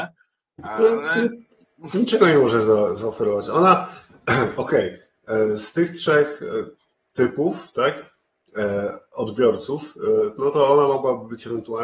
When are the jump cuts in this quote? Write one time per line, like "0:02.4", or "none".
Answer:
none